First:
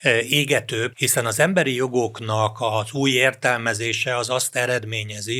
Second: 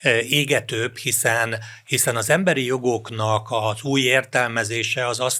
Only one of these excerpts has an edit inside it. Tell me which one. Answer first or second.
first